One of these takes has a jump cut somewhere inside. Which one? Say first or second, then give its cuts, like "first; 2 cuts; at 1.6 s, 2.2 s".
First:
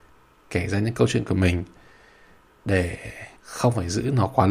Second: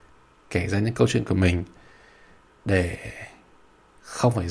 first; 1 cut; at 3.4 s